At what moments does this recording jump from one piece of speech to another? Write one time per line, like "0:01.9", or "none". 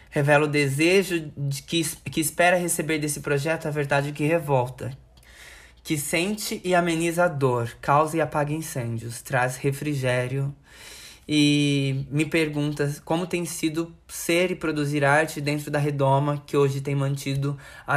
none